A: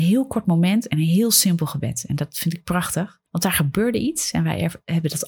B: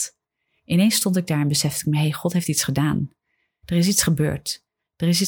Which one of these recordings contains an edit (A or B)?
A